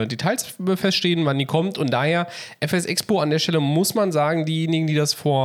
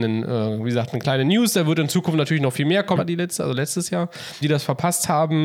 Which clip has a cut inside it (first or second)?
second